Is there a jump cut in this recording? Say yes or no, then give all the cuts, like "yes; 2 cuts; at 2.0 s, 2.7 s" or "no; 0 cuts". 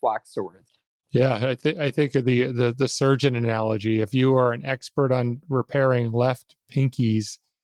yes; 1 cut; at 1.0 s